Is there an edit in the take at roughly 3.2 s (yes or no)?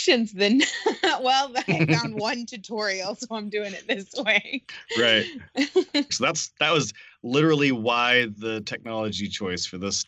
no